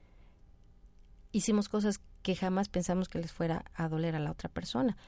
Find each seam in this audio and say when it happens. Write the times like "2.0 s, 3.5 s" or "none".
none